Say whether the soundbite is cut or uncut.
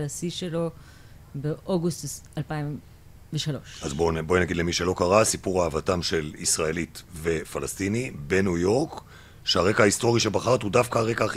uncut